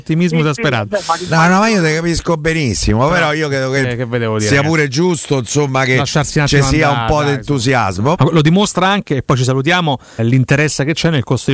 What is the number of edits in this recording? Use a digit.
2